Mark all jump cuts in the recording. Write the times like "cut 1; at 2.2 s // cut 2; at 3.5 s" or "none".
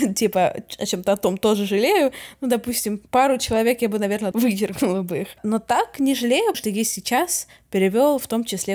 cut 1; at 4.3 s // cut 2; at 6.5 s